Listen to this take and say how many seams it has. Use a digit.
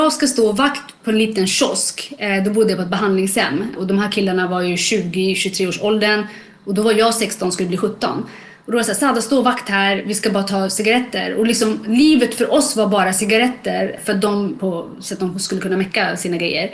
1